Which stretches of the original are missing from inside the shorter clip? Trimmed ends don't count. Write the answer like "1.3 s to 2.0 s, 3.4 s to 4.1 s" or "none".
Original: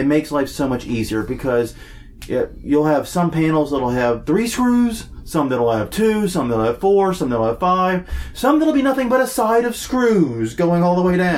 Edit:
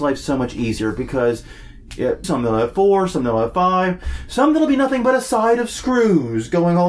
2.5 s to 6.3 s